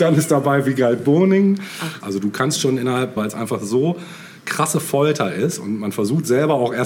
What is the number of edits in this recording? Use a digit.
2